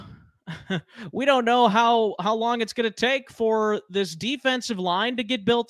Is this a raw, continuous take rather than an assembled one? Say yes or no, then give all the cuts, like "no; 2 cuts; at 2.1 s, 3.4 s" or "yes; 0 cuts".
yes; 0 cuts